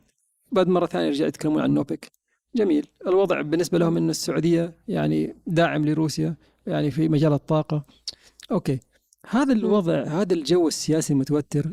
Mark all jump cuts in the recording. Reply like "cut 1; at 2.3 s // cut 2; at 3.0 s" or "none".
cut 1; at 6.9 s